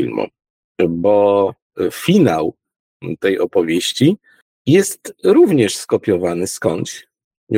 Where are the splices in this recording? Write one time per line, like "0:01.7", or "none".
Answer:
none